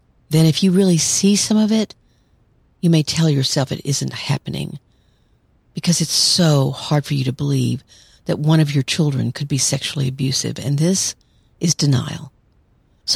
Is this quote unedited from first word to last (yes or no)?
yes